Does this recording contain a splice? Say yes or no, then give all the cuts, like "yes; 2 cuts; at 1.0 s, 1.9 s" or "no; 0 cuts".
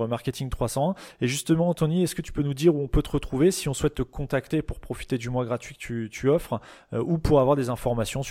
no; 0 cuts